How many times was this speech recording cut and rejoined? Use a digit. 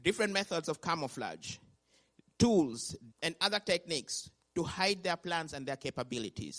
1